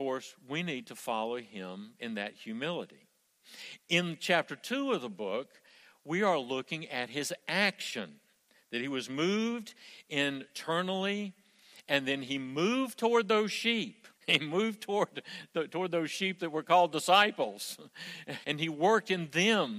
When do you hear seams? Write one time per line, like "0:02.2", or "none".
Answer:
0:14.2
0:18.4